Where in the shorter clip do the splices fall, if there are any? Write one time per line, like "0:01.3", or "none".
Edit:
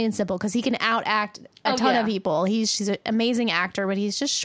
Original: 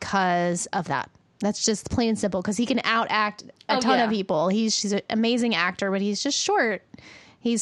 none